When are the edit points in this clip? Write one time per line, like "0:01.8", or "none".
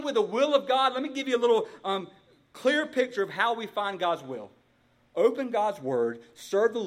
none